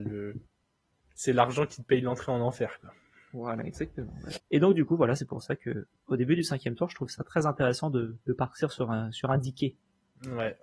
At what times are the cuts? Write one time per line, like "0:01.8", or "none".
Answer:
0:04.3